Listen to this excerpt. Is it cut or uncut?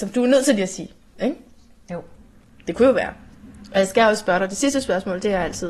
uncut